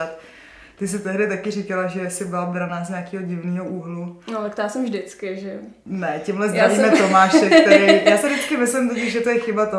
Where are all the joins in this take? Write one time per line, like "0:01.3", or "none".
none